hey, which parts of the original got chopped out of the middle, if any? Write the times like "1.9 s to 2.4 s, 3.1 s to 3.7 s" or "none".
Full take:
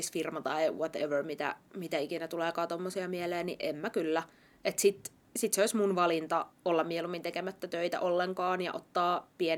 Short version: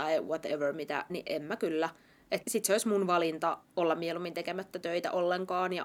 1.6 s to 3.4 s, 4.8 s to 5.3 s

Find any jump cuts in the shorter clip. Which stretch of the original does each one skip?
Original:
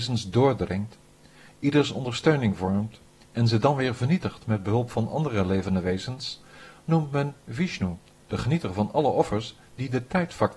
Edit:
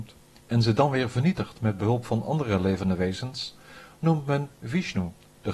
none

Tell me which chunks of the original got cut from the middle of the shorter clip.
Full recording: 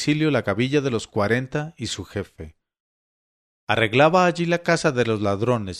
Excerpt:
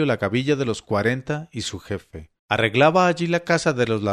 2.6 s to 3.6 s

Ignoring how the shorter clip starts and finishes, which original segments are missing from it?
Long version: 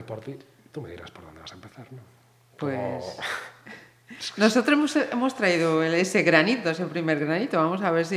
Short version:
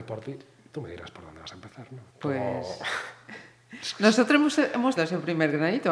2.1 s to 2.5 s, 5.3 s to 6.6 s

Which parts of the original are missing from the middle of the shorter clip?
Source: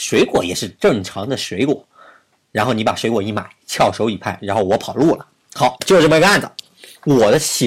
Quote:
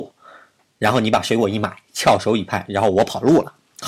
none

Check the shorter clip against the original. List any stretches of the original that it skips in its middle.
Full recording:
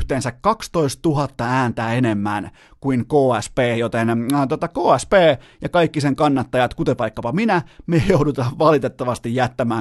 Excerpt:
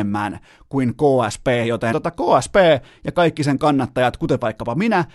4.0 s to 4.5 s

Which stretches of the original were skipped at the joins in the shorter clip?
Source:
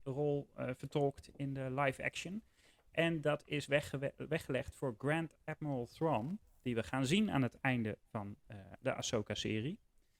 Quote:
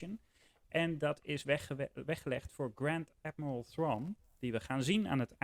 none

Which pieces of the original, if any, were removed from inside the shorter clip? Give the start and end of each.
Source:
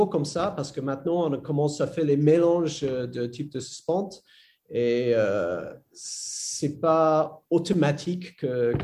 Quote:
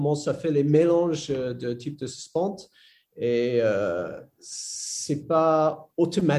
none

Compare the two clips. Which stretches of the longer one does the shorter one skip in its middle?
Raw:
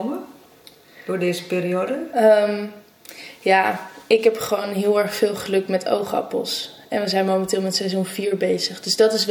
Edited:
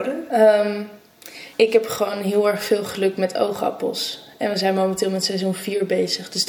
3.4 s to 4.0 s

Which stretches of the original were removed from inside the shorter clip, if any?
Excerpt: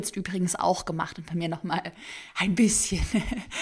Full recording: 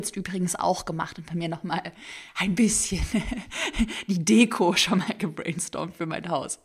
none

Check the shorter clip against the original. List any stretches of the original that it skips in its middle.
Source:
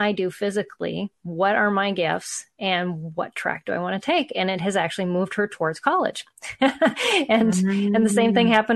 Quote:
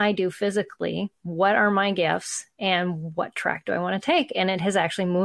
none

